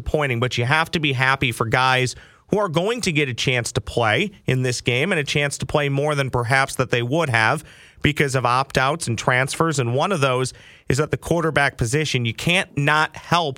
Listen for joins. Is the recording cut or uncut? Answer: uncut